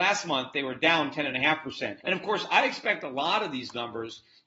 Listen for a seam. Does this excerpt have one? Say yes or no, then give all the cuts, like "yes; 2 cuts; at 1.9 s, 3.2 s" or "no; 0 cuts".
yes; 1 cut; at 2.0 s